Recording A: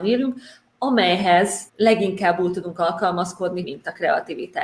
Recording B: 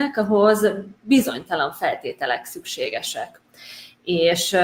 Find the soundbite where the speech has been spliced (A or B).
A